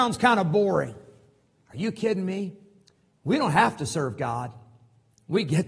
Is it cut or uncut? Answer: uncut